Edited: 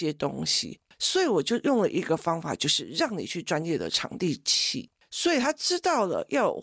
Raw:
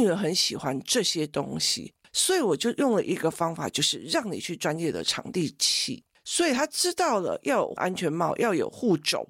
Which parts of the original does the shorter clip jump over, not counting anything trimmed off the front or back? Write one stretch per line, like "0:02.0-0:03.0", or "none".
none